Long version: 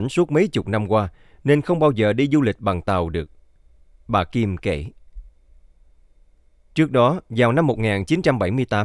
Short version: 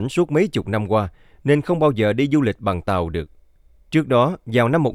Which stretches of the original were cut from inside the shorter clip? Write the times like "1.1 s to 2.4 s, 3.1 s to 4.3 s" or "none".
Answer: 3.8 s to 6.7 s